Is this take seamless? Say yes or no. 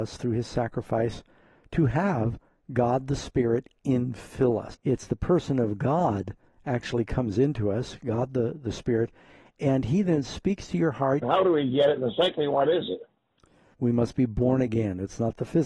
no